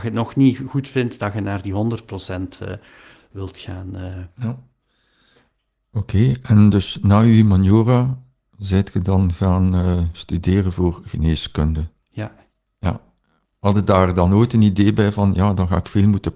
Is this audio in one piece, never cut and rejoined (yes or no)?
yes